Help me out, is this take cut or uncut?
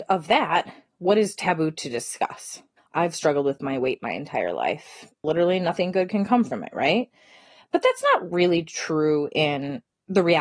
cut